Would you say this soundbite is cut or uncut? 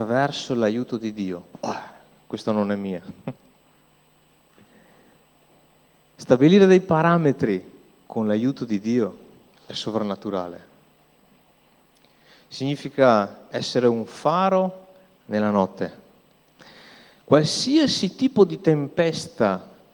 uncut